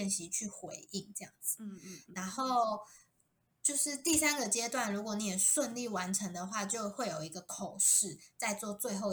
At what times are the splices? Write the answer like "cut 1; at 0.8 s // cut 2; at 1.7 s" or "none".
none